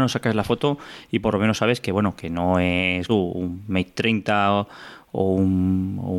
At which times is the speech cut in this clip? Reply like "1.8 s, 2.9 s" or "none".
3.1 s